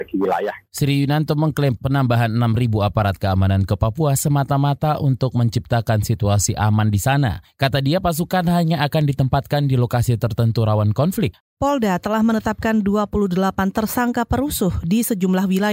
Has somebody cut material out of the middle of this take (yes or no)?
yes